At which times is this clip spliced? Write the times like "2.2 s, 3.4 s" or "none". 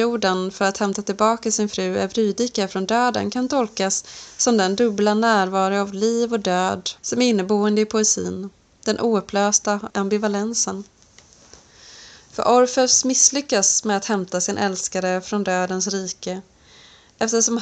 7.0 s